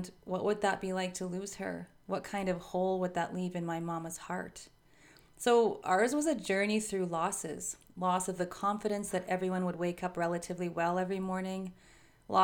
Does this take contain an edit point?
no; 0 cuts

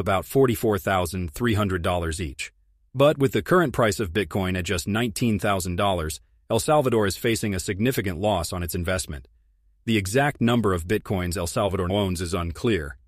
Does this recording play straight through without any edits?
no; 1 cut; at 11.9 s

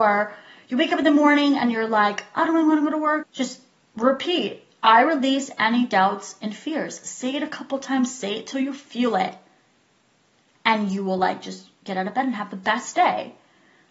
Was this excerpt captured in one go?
no; 1 cut; at 3.2 s

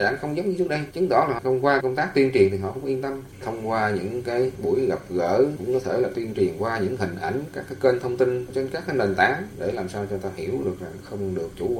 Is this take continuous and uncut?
no; 1 cut; at 1.8 s

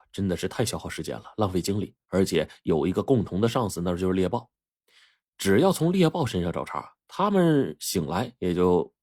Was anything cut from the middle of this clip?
no; 0 cuts

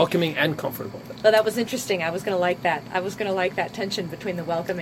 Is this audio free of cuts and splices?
no; 1 cut; at 1.2 s

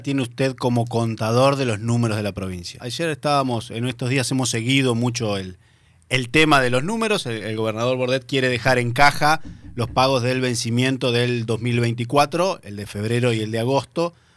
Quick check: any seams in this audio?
yes; 1 cut; at 2.8 s

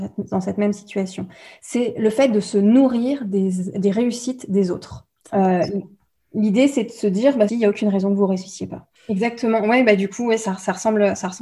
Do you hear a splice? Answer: yes; 2 cuts; at 7.5 s, 8.9 s

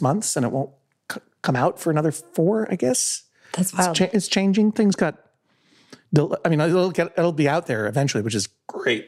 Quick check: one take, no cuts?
yes; 0 cuts

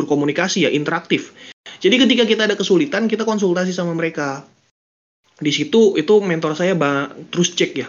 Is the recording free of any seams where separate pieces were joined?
yes; 0 cuts

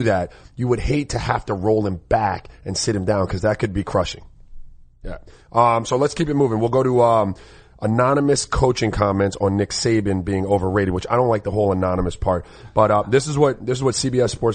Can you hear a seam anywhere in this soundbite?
no; 0 cuts

